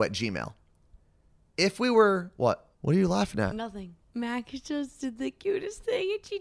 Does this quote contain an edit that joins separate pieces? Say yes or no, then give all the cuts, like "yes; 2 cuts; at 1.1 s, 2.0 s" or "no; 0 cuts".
yes; 2 cuts; at 2.7 s, 4.0 s